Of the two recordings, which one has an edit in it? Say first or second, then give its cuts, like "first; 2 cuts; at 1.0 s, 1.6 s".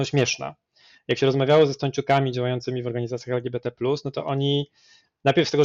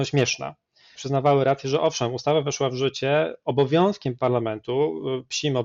second; 1 cut; at 0.9 s